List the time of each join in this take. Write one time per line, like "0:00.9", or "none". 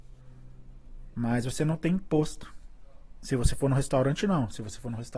0:01.1